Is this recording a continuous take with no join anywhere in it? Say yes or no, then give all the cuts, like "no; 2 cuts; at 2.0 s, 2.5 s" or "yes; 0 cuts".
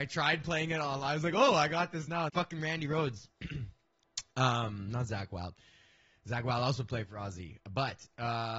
no; 1 cut; at 2.3 s